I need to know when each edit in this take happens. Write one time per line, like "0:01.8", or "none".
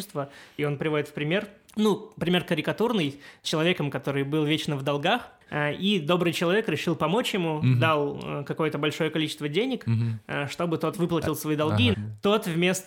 0:11.9